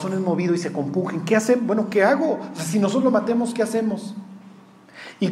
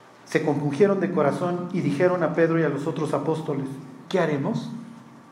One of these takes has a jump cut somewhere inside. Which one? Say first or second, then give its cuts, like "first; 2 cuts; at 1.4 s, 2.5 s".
second; 1 cut; at 4.0 s